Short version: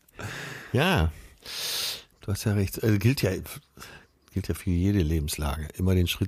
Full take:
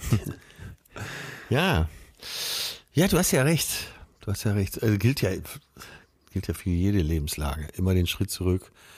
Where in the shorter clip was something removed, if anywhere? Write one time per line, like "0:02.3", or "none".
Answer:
0:02.1